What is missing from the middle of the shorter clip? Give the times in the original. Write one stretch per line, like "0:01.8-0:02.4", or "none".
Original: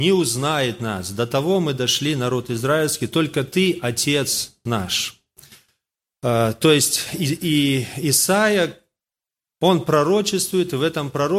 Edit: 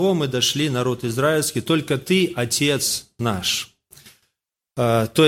none